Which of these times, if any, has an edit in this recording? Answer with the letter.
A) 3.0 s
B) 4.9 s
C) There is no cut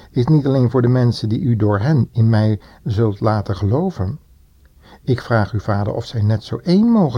C